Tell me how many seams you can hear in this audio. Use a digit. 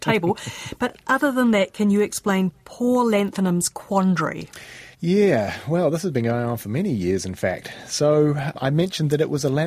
1